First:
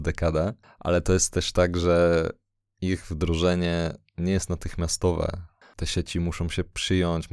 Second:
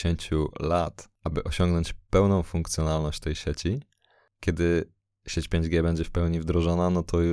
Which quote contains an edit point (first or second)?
first